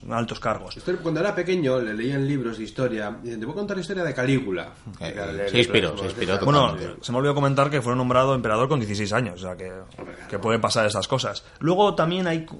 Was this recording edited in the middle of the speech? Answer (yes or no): no